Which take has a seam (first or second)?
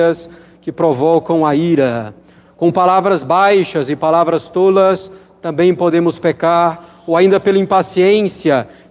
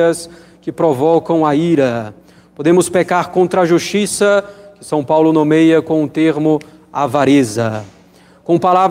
first